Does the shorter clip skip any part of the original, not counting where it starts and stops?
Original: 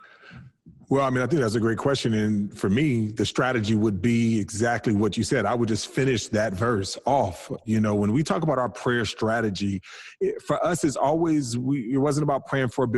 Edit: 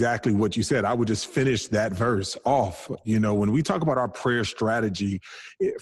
no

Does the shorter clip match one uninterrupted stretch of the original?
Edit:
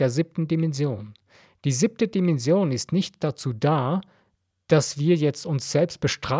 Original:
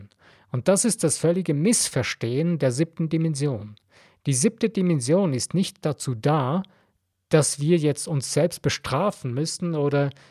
yes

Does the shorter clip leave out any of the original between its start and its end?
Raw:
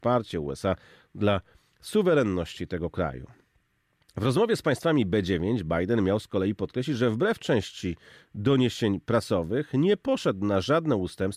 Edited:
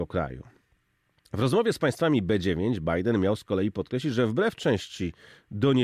no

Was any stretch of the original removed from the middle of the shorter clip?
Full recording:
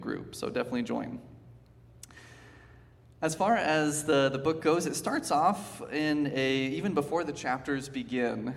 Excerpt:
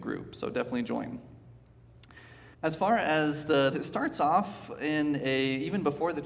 yes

